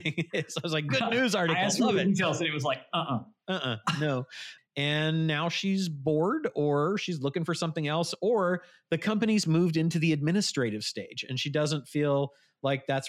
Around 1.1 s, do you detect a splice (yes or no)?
no